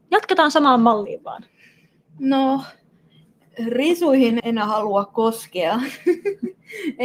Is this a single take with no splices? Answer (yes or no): no